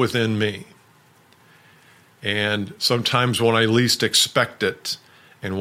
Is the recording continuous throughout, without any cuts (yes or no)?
yes